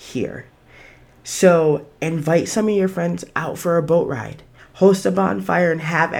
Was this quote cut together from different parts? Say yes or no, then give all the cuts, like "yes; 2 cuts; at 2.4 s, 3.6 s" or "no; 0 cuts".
yes; 1 cut; at 4.6 s